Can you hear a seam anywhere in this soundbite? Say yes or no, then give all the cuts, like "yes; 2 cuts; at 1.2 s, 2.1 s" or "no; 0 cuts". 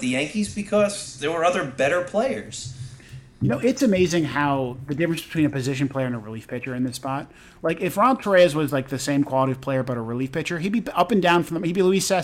no; 0 cuts